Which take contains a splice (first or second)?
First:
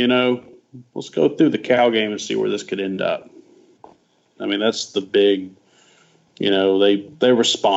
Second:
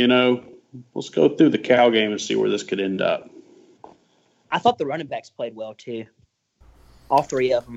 first